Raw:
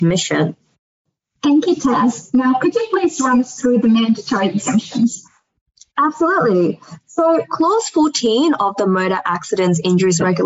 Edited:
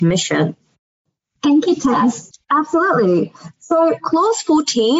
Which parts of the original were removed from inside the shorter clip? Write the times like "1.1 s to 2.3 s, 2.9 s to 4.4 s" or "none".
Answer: 2.3 s to 5.8 s